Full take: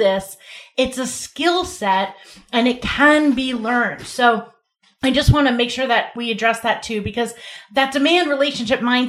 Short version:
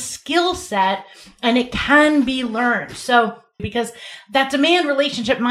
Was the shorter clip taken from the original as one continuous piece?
no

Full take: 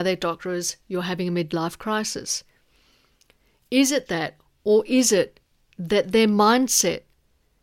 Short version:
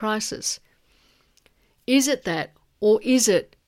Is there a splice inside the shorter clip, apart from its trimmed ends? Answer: no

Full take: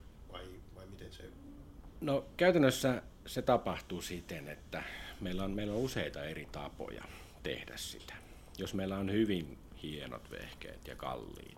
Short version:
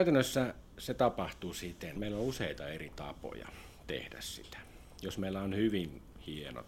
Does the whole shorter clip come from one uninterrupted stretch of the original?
no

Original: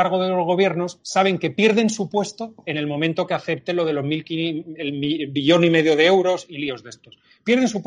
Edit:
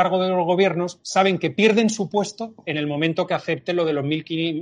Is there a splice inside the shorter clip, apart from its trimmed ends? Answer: no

